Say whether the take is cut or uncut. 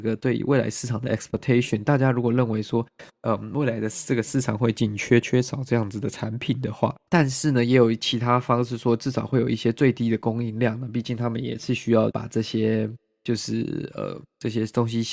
cut